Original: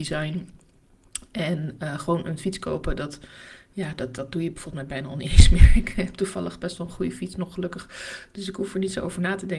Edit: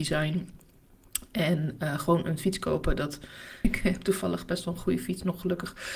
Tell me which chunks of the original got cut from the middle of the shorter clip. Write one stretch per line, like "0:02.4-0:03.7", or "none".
0:03.6-0:05.8

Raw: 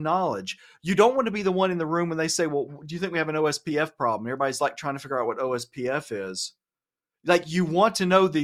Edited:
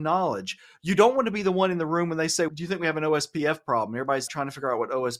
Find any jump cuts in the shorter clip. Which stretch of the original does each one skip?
0:02.5-0:02.8
0:04.6-0:04.8

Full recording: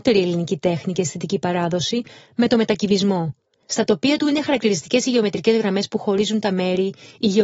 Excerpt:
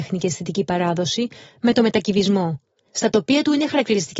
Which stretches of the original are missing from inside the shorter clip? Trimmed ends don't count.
none

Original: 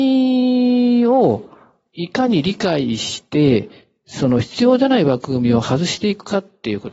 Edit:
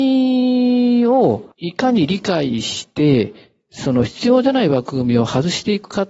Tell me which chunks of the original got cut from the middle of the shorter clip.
0:01.5-0:01.9

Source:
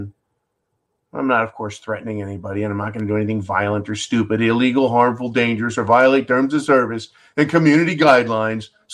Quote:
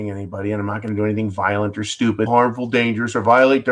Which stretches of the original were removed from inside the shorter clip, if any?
0:04.4-0:04.9

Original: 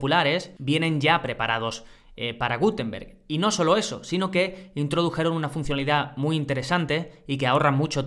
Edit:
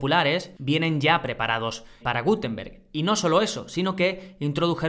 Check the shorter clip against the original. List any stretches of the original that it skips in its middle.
0:02.0-0:02.4

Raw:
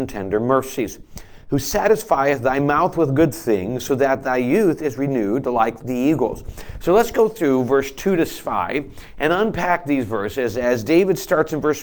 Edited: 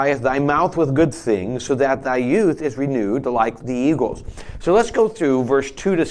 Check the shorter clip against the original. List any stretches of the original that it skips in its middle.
none

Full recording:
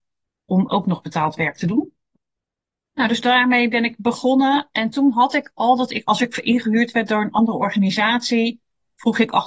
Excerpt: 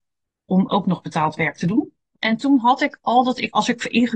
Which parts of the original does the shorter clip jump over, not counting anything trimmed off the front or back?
0:02.2-0:04.7

